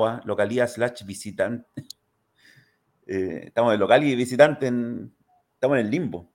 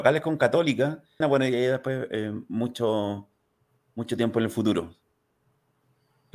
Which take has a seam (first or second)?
second